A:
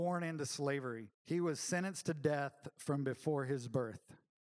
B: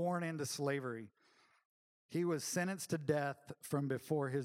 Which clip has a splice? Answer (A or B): A